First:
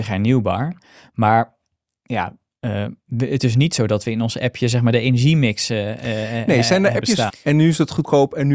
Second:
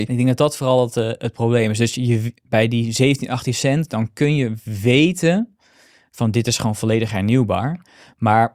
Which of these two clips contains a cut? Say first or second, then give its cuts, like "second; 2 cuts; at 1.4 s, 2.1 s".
first; 1 cut; at 7.3 s